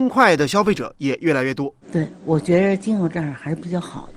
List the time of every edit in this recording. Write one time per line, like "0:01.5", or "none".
0:01.8